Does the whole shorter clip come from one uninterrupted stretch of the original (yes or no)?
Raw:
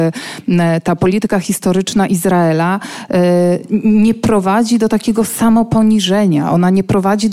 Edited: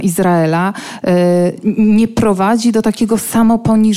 yes